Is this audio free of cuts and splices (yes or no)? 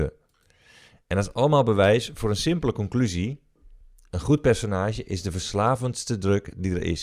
yes